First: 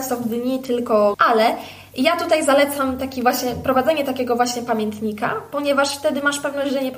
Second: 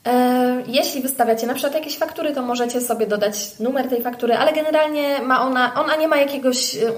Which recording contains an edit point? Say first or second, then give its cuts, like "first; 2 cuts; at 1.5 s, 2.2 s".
first; 1 cut; at 1.1 s